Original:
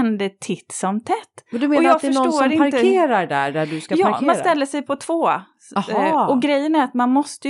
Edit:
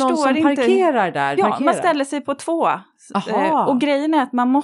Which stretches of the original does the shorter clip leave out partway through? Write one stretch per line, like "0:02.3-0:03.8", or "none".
0:03.5-0:04.0